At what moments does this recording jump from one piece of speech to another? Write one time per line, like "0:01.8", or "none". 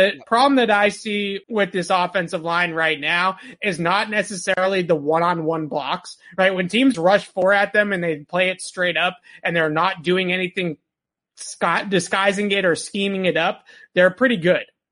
0:01.4
0:06.9